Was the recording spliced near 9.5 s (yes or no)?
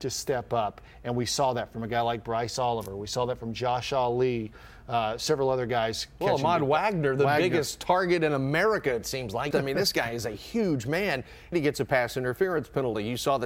yes